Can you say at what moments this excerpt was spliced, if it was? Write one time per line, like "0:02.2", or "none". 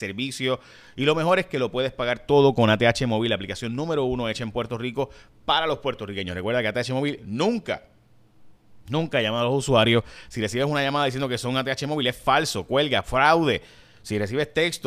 none